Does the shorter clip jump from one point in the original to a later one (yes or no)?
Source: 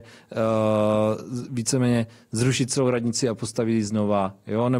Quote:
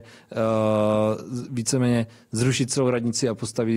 no